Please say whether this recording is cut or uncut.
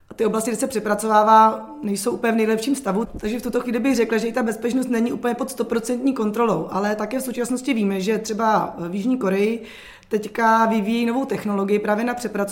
uncut